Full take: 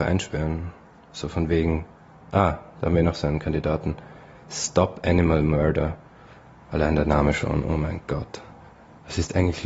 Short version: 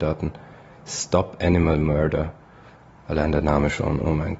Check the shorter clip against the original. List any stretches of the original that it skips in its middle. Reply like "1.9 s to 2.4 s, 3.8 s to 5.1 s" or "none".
none